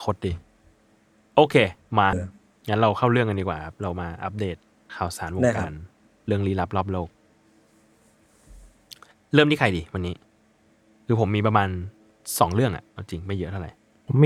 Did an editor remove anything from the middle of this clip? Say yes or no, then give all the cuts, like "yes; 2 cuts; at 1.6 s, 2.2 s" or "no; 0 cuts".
yes; 1 cut; at 2.1 s